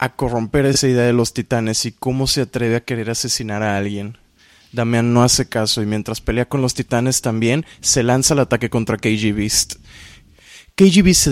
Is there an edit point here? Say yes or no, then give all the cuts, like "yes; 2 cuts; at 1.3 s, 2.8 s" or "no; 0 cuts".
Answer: no; 0 cuts